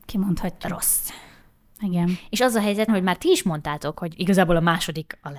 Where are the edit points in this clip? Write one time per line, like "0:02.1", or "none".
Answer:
0:02.9